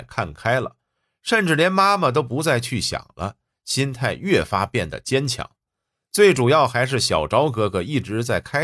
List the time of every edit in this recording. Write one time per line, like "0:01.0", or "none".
none